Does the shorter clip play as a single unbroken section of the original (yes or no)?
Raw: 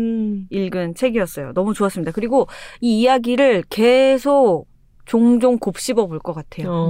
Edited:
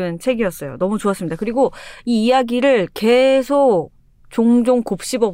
yes